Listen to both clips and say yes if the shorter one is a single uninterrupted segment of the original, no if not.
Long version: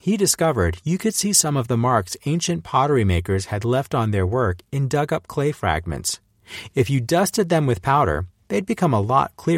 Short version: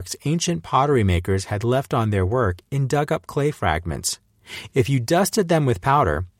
yes